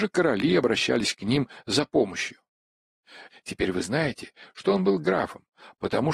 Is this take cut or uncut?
cut